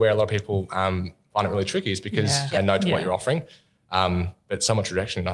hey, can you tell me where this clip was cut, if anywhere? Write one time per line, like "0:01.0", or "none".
0:02.5